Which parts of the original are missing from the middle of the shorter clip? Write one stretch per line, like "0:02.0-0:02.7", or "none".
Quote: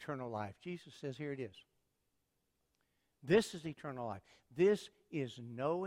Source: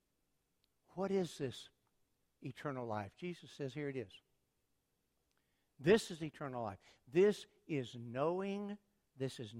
none

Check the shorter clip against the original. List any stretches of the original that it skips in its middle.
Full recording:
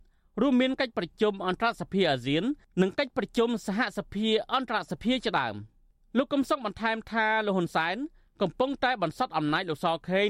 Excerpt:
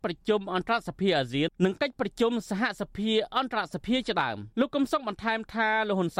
0:02.4-0:02.7
0:05.7-0:06.1

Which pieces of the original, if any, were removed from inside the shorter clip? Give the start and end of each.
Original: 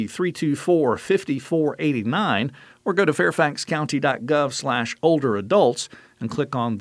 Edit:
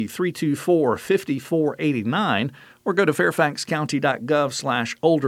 none

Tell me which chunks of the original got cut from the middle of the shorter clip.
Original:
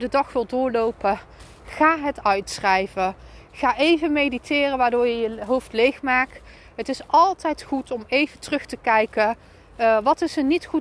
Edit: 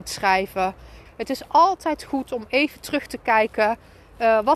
0:03.5-0:06.6

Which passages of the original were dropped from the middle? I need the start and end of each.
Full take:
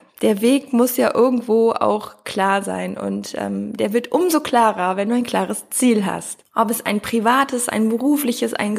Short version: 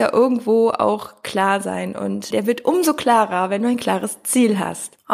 0:03.3-0:03.8

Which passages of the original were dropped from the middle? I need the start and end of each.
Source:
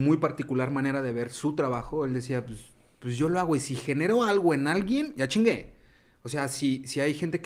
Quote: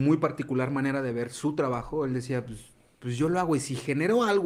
none

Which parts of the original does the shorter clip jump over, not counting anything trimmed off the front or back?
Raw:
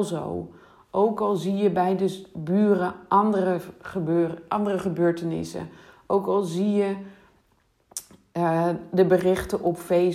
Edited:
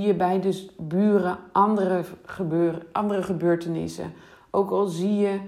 none

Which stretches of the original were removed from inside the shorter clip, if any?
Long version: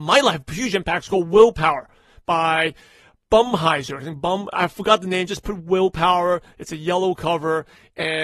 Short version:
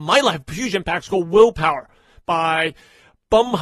none

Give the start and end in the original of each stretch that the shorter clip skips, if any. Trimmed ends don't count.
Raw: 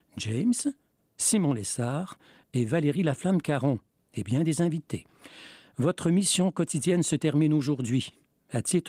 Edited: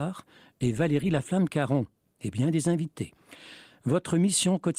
none

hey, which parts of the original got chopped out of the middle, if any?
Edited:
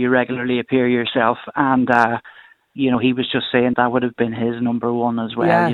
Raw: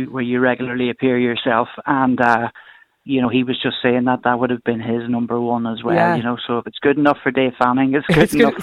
0:04.0-0:04.2

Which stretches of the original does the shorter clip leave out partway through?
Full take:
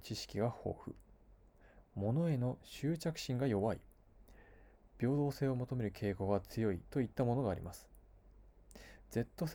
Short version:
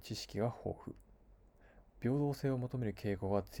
0:01.9-0:04.8

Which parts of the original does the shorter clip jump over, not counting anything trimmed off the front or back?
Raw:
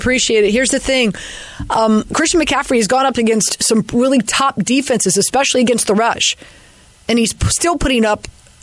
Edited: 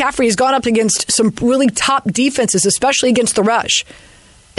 none

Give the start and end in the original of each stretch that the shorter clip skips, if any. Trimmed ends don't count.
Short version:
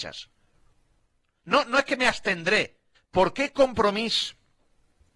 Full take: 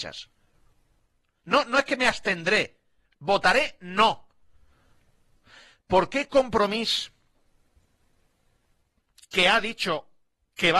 0:02.9-0:05.7

